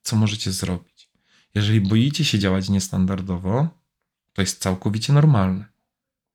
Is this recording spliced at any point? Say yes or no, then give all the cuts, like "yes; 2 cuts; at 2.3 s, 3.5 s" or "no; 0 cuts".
no; 0 cuts